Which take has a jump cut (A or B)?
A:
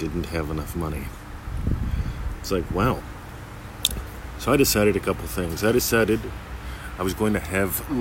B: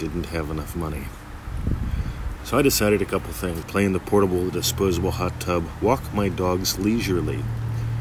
B